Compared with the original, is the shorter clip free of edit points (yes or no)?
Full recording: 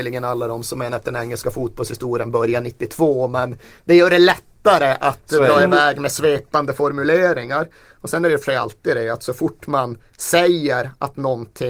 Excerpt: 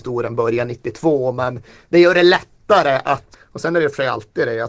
no